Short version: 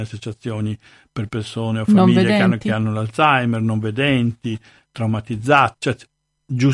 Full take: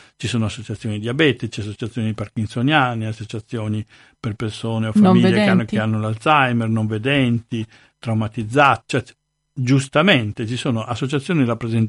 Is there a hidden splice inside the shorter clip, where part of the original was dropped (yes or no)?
no